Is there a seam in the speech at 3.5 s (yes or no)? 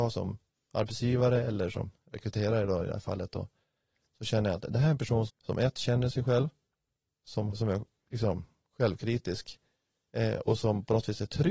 no